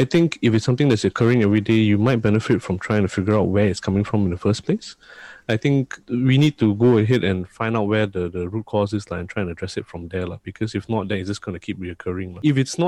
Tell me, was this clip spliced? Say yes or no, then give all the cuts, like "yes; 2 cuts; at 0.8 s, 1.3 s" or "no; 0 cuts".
no; 0 cuts